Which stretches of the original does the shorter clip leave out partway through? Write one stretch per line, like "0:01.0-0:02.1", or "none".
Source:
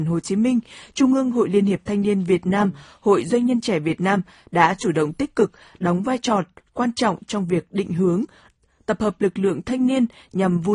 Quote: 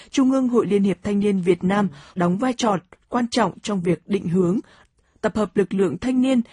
0:02.9-0:05.8